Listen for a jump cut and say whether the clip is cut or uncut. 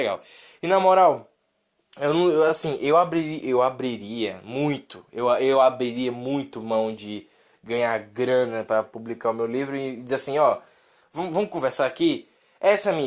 uncut